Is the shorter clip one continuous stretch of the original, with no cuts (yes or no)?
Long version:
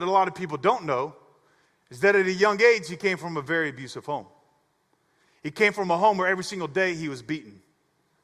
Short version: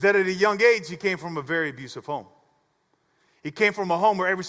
yes